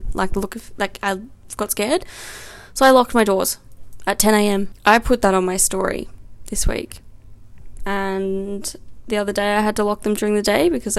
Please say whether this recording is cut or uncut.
cut